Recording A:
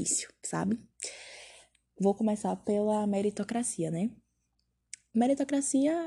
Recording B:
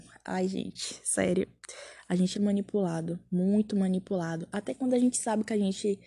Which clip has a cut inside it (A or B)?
B